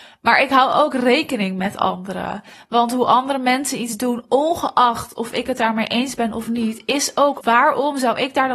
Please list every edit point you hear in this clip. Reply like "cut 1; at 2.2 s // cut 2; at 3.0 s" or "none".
cut 1; at 2.5 s // cut 2; at 7.4 s